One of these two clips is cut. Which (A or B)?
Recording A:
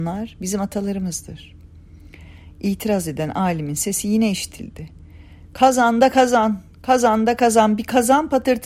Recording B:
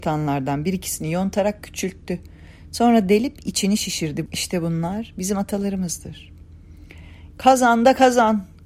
B